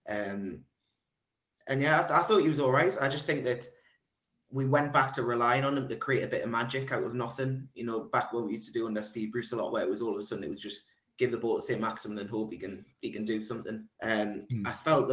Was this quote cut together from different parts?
yes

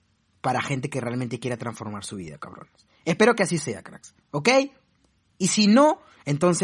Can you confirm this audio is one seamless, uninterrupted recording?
yes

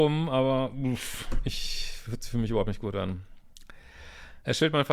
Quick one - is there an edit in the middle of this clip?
no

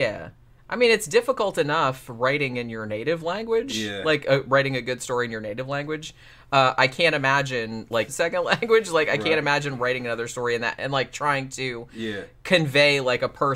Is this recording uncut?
no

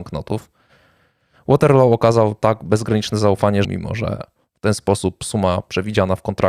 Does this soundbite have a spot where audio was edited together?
yes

